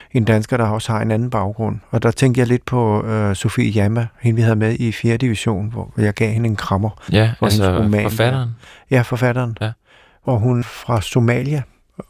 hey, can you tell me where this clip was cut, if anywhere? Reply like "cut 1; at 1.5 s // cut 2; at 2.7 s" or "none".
cut 1; at 10.6 s